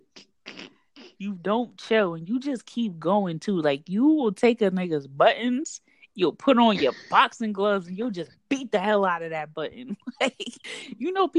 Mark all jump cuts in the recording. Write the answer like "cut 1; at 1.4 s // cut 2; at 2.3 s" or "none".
cut 1; at 1.2 s